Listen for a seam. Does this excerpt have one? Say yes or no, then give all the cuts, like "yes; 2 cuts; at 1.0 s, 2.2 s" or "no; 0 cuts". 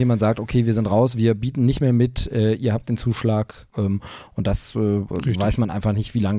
no; 0 cuts